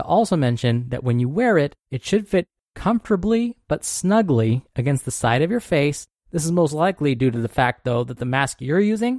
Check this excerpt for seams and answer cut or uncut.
cut